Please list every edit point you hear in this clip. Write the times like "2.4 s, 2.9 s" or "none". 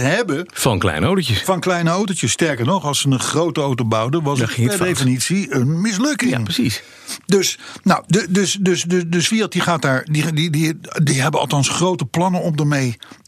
none